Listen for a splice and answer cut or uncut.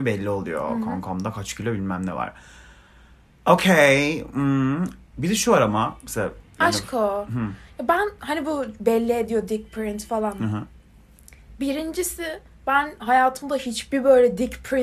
uncut